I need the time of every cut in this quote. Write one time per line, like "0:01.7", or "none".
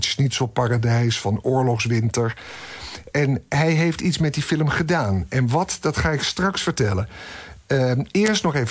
0:03.1